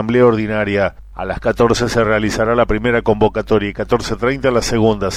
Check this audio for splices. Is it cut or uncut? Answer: cut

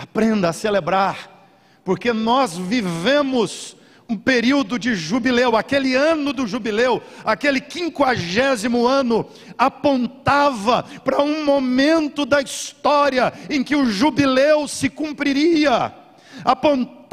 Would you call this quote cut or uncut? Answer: uncut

